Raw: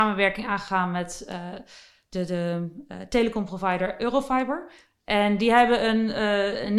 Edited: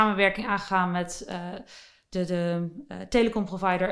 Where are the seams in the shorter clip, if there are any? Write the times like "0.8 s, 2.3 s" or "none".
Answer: none